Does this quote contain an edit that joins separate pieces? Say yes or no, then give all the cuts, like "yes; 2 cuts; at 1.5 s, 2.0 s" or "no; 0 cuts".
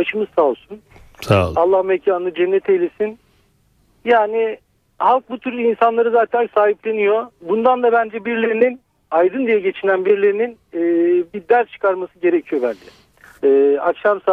yes; 1 cut; at 13.4 s